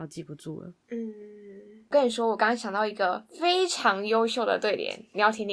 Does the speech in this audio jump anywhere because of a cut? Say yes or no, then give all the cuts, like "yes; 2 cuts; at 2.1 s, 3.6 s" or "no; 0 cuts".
no; 0 cuts